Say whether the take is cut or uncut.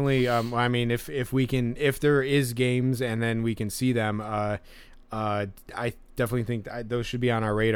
uncut